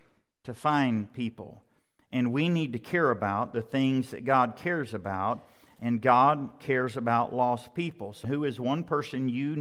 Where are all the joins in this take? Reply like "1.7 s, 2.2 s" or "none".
8.2 s

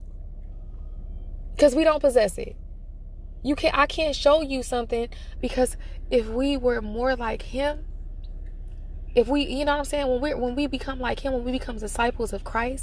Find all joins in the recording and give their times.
5.4 s

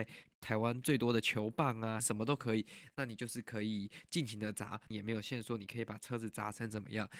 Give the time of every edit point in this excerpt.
2.0 s, 4.9 s

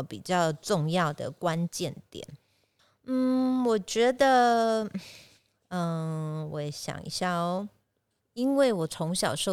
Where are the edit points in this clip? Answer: 8.2 s

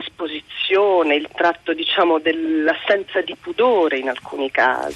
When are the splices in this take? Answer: none

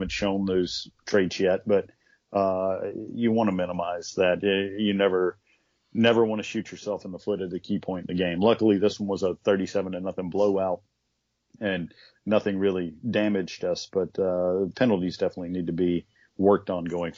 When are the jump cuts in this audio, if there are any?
none

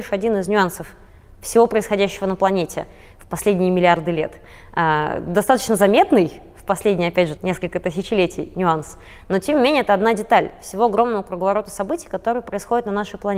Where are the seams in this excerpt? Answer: 7.4 s

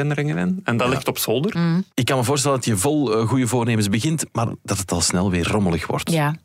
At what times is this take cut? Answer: 1.5 s

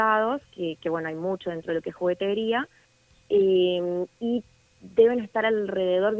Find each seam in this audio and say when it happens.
none

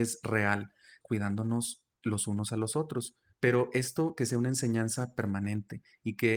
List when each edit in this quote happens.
1.0 s, 3.3 s

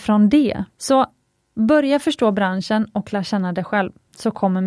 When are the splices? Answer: none

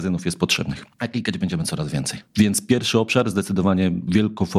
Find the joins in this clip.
0.9 s

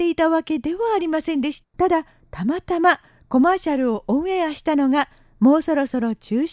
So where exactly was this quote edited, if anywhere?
1.6 s

